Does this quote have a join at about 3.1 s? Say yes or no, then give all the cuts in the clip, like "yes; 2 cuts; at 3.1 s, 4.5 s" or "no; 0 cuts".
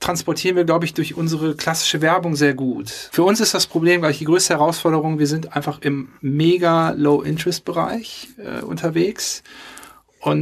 yes; 1 cut; at 3.1 s